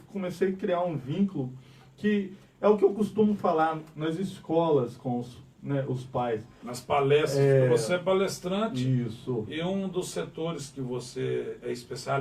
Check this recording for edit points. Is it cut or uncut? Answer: uncut